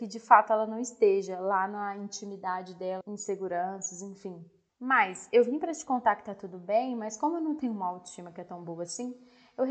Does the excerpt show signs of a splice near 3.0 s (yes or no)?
yes